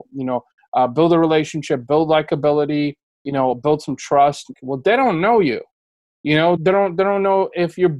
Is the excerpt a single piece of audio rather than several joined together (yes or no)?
no